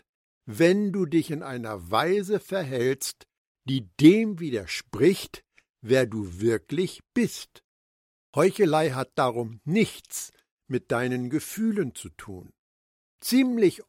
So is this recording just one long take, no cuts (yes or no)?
yes